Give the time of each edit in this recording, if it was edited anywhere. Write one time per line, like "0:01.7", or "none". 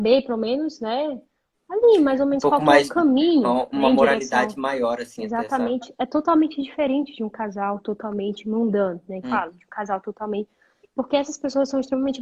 0:09.2